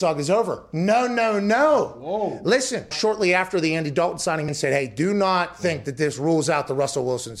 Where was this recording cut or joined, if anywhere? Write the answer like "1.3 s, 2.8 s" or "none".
2.9 s, 4.5 s